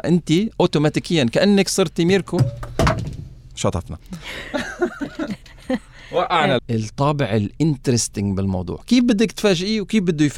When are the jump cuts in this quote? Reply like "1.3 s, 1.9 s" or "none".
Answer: 6.6 s